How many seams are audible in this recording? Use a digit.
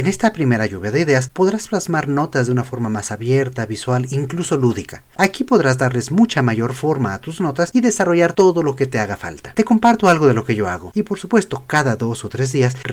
2